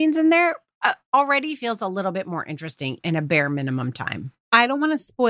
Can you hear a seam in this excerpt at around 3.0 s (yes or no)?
yes